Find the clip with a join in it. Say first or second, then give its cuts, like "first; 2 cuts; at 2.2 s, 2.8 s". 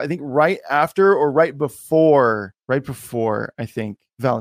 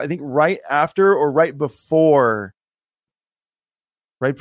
first; 1 cut; at 2.6 s